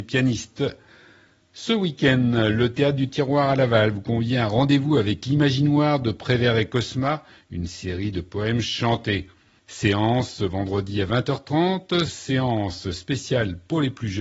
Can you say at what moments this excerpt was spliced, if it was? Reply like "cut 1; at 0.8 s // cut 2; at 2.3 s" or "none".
cut 1; at 12.1 s